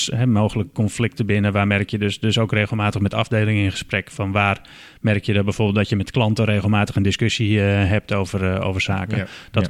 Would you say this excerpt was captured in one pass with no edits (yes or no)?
yes